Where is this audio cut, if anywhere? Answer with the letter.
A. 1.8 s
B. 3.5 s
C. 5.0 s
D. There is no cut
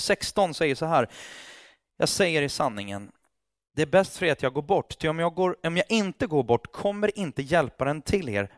D